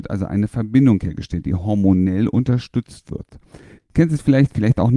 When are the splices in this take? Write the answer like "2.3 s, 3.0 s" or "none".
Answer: 3.8 s